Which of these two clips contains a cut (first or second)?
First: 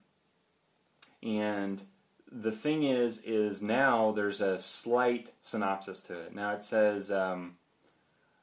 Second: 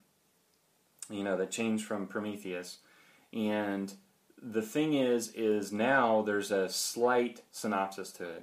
first